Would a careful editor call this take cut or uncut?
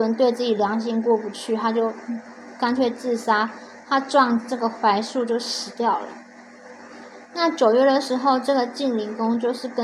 uncut